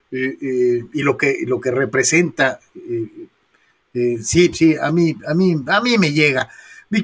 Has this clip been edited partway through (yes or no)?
no